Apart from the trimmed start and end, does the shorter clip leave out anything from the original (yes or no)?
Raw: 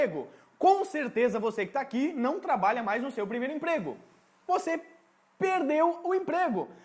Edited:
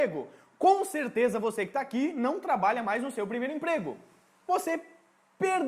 no